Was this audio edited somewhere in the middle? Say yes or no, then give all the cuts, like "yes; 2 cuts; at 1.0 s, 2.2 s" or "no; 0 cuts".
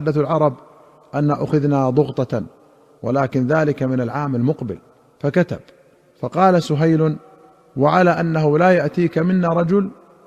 no; 0 cuts